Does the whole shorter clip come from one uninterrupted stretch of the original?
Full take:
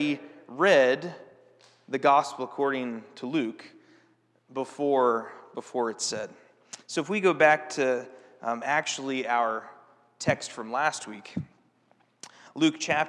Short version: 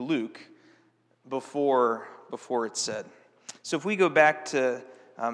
yes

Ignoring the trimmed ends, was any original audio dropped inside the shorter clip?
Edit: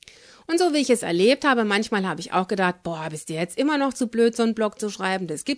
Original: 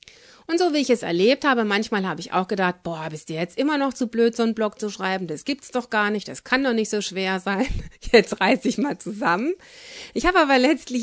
no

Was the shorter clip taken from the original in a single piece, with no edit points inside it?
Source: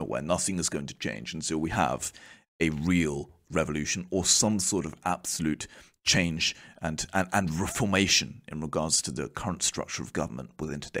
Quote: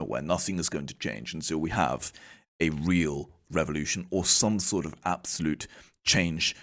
yes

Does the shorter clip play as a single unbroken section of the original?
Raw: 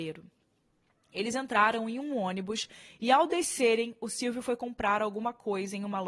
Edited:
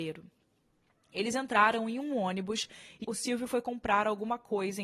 no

